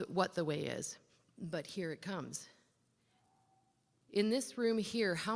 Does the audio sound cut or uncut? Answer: cut